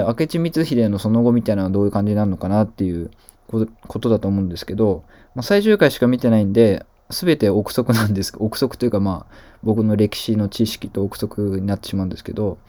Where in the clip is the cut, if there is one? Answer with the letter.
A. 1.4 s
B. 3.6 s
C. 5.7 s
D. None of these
D